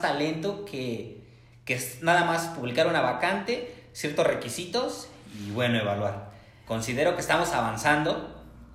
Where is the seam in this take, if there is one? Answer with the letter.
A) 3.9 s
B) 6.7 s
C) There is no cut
B